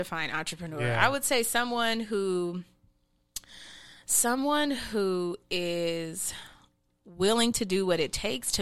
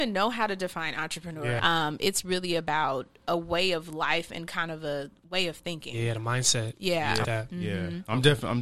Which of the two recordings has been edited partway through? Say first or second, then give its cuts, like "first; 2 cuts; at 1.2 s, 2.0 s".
second; 2 cuts; at 1.6 s, 7.2 s